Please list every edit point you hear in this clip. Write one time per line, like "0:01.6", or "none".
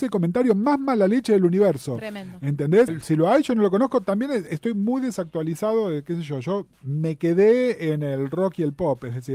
0:02.9
0:06.7